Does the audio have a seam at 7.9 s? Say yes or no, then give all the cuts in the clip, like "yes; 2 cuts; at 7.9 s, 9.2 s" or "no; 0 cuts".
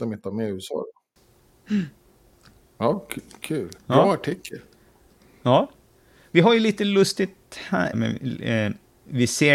yes; 2 cuts; at 3.8 s, 7.9 s